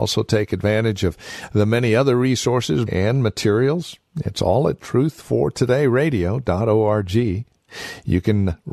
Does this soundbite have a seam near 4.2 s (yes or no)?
no